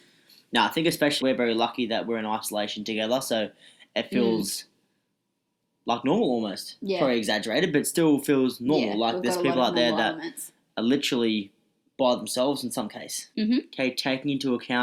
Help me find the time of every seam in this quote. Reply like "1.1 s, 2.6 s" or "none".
1.2 s, 13.3 s